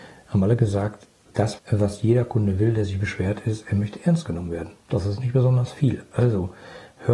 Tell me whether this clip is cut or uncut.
cut